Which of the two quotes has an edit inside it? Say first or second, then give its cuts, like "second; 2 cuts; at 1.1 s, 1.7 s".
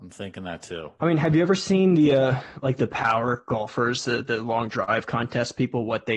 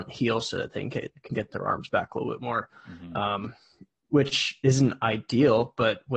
first; 1 cut; at 1.0 s